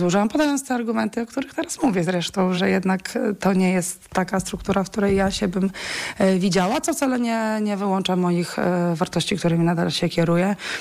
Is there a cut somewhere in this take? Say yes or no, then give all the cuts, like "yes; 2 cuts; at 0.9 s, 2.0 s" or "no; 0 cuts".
yes; 1 cut; at 2.5 s